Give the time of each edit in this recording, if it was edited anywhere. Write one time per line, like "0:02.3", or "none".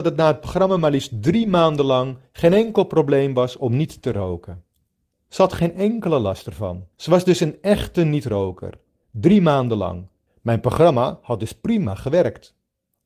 0:06.9
0:10.3